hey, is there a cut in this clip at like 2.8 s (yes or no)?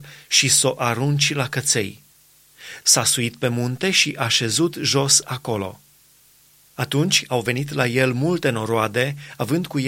yes